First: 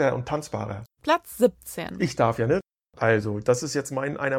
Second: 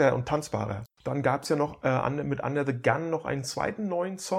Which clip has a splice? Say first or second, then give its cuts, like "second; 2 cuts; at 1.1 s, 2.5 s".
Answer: second; 1 cut; at 1.0 s